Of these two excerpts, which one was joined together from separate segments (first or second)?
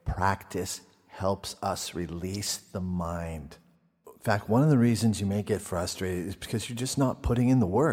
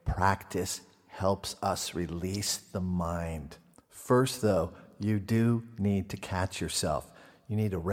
second